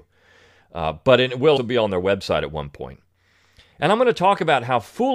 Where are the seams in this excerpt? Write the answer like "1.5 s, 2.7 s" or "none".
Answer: 1.6 s